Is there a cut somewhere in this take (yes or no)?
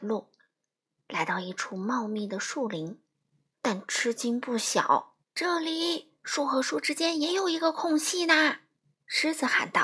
yes